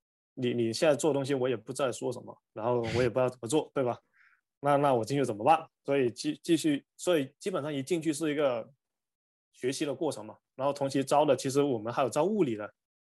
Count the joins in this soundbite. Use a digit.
1